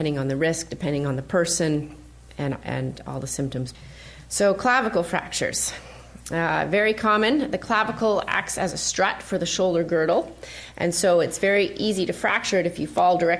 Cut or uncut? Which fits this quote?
uncut